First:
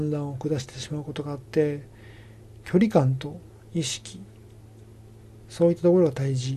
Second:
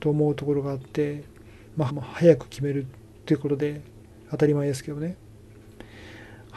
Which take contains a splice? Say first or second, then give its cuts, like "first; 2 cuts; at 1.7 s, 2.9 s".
second; 1 cut; at 1.9 s